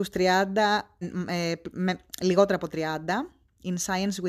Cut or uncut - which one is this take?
cut